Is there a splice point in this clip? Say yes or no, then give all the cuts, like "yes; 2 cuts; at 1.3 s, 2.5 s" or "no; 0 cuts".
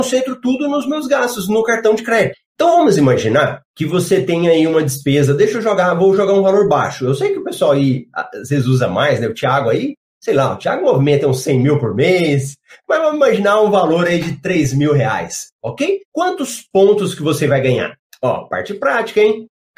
yes; 2 cuts; at 2.3 s, 16.0 s